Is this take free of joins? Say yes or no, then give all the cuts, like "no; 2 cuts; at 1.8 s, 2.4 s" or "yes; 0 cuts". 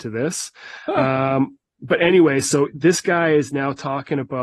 yes; 0 cuts